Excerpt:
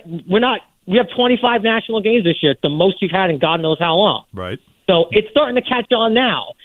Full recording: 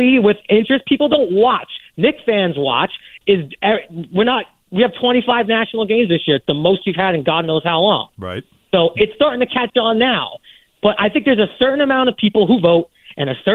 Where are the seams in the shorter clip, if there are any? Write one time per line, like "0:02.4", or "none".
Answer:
none